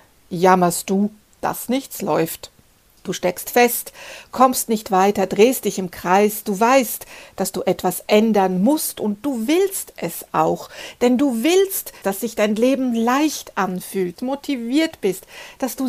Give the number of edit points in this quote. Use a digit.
2